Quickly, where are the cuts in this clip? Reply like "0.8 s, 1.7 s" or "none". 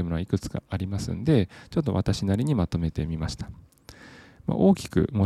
none